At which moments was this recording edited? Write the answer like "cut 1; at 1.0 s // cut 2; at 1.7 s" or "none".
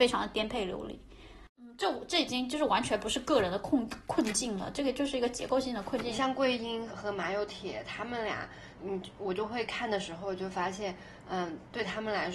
cut 1; at 6.9 s // cut 2; at 8.8 s